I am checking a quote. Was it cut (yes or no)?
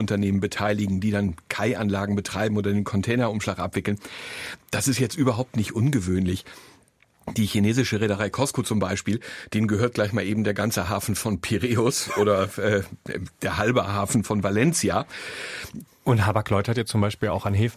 yes